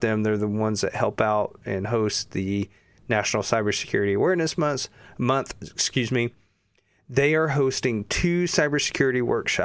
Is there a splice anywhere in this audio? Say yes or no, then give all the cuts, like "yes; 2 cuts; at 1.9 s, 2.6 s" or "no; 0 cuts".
no; 0 cuts